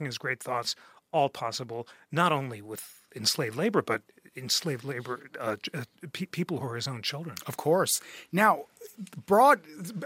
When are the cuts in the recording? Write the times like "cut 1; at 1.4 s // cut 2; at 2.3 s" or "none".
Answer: none